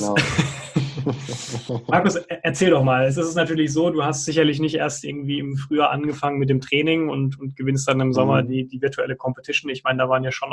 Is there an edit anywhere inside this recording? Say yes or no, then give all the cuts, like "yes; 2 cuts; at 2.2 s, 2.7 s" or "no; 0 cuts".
no; 0 cuts